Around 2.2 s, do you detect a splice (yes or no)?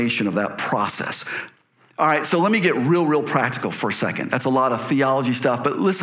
no